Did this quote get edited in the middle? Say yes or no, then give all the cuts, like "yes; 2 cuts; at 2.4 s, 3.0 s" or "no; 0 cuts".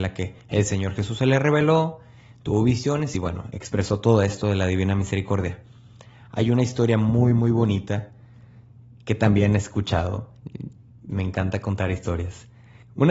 no; 0 cuts